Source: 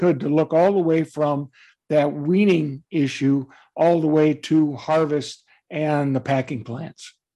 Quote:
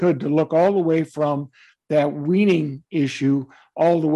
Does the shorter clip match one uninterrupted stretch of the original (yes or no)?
yes